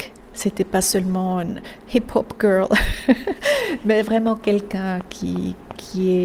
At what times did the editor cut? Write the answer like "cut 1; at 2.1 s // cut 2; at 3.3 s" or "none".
none